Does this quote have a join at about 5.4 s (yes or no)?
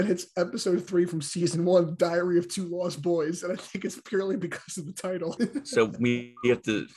yes